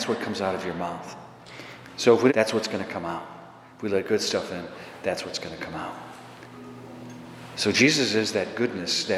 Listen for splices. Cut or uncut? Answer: cut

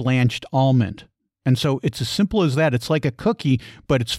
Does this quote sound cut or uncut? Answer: uncut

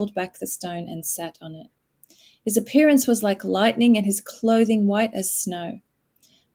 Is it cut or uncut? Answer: uncut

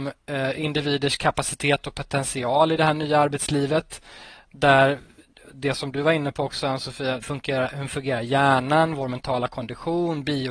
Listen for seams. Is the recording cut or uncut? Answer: cut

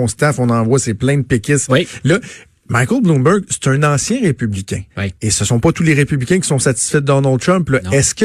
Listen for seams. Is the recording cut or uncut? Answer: cut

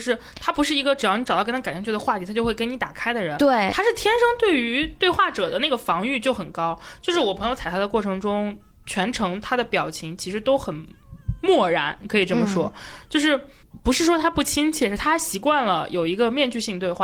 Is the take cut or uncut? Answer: uncut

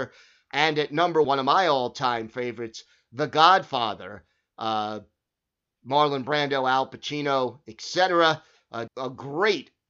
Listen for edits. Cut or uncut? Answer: cut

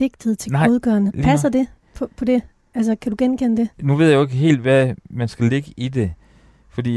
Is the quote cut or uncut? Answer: cut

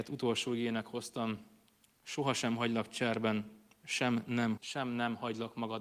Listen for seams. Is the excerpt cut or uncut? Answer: cut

